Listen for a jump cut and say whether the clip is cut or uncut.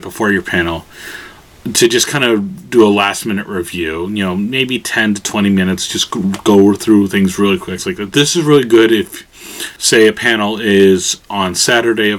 cut